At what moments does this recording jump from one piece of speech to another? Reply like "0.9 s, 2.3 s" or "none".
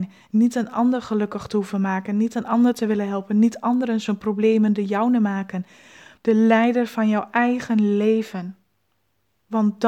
6.2 s